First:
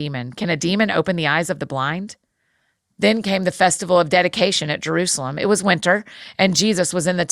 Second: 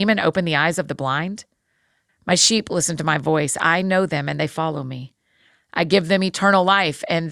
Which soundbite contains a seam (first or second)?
second